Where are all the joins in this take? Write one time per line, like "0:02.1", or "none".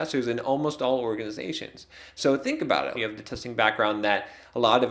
0:02.9